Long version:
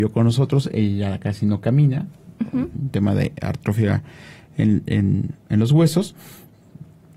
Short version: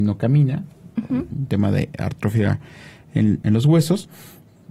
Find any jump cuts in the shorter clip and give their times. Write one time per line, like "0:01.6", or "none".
0:03.4